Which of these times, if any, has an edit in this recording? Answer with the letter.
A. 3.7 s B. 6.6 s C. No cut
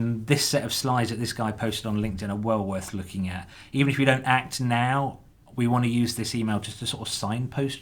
C